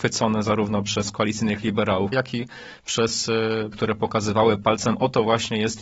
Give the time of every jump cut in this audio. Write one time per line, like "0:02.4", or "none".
0:02.1
0:03.7